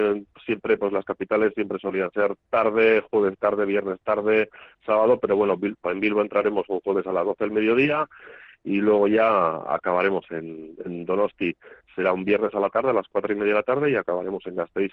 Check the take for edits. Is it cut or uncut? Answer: uncut